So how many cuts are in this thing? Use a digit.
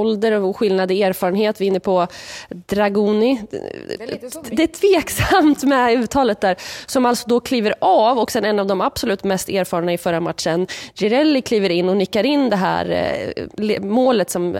0